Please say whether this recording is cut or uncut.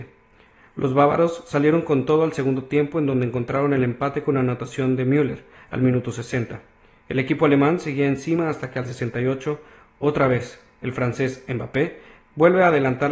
uncut